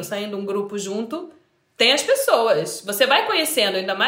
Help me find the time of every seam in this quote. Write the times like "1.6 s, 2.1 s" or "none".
none